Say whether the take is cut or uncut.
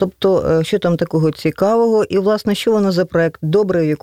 uncut